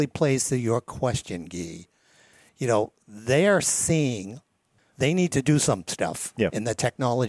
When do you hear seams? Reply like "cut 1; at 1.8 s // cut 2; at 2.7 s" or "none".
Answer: cut 1; at 4.8 s